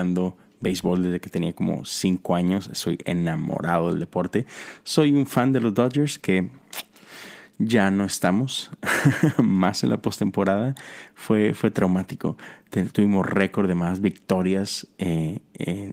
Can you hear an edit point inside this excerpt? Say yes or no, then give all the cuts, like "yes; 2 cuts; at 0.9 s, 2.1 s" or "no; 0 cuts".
no; 0 cuts